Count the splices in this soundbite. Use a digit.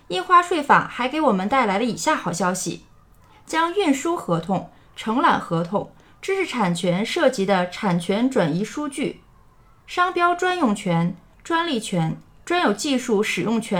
1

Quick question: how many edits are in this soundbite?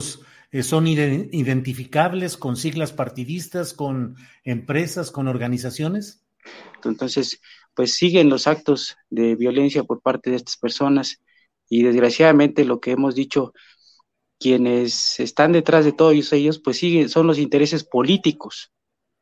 1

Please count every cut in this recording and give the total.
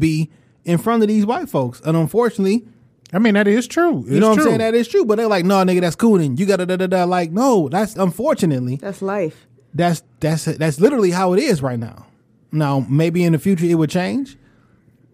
1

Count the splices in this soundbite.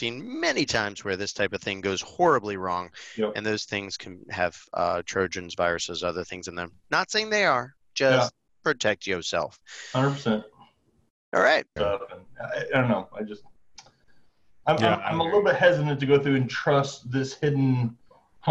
1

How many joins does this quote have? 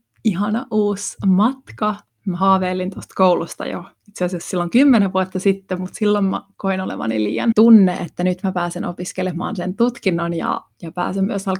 1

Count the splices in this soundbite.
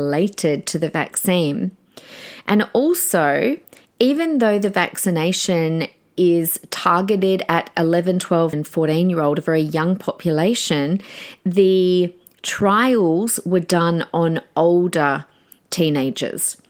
1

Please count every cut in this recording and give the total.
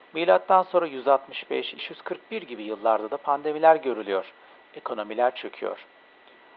2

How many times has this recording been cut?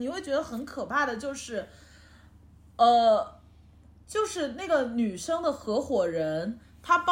0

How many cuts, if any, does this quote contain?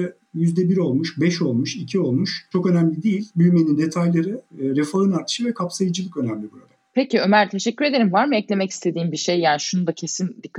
0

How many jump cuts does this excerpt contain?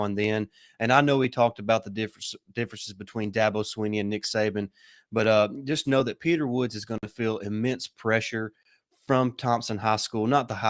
1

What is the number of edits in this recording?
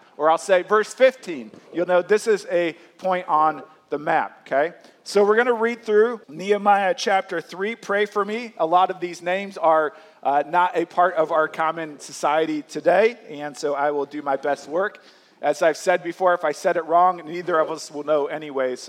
1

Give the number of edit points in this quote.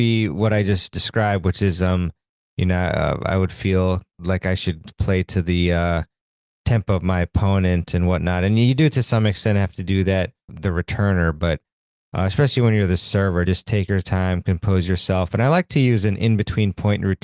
0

